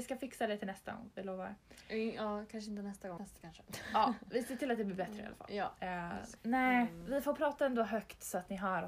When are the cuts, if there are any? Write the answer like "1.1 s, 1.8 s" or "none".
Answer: 3.2 s, 6.4 s

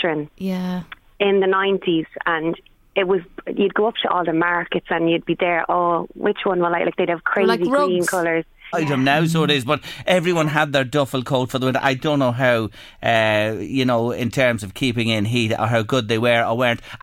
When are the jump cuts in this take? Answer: 8.7 s

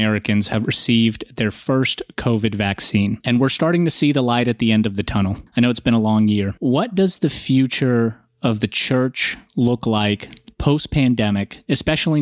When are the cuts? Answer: none

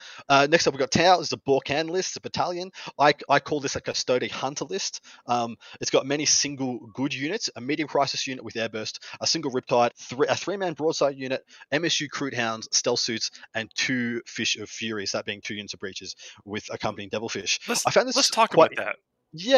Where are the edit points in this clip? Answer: 9.9 s

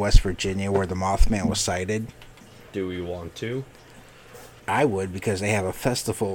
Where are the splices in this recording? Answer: 2.7 s, 4.6 s

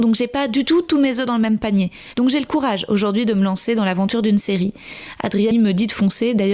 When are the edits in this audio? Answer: 2.1 s, 5.5 s

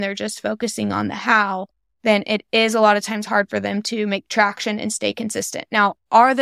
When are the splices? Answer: none

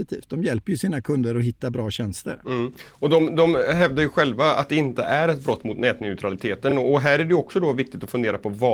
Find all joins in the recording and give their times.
none

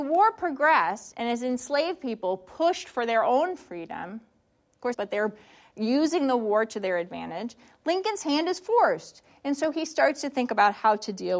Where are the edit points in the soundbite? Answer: 4.9 s

